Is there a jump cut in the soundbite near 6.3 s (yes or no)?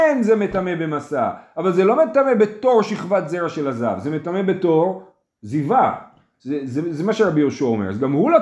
yes